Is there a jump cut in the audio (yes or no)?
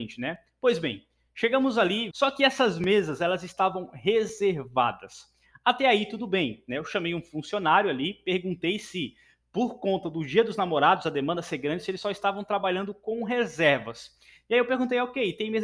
yes